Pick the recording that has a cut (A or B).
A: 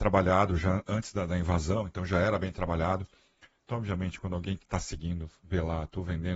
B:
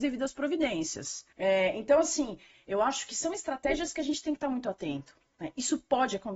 B